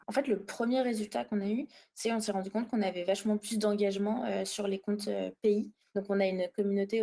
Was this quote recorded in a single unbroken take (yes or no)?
no